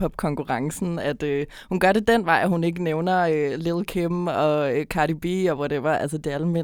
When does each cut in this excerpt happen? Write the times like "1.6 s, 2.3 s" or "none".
none